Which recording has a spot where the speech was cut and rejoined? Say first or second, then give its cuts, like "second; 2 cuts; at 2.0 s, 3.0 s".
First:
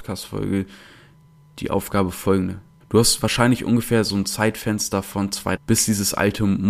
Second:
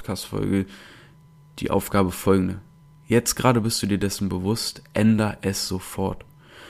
first; 2 cuts; at 2.8 s, 5.6 s